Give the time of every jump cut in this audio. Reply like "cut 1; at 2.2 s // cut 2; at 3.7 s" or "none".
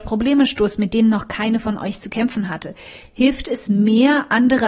none

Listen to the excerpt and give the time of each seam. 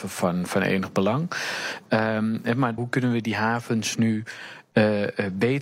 cut 1; at 2.8 s

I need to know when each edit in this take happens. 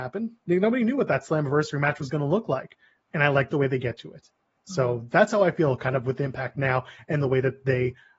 none

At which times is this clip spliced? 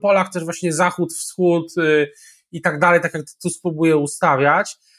none

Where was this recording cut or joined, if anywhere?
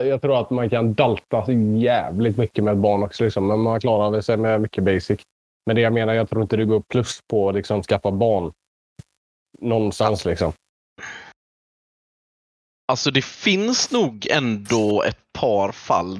none

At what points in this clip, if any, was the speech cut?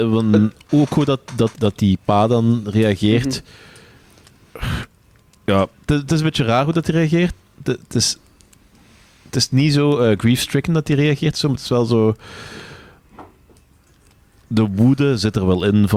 cut 1; at 1.5 s

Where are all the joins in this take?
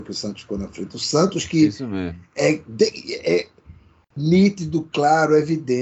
none

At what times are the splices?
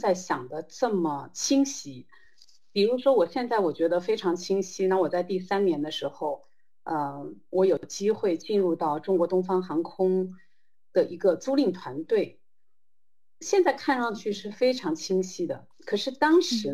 none

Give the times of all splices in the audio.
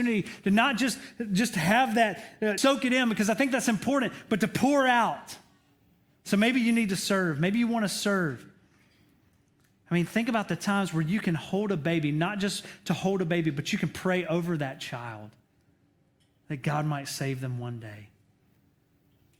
cut 1; at 2.6 s

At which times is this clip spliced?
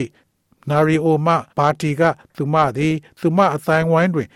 cut 1; at 1.5 s

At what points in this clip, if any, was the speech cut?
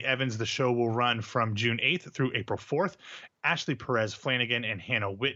cut 1; at 3.3 s

